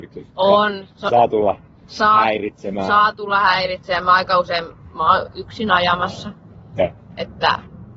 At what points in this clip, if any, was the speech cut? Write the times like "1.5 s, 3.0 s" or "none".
none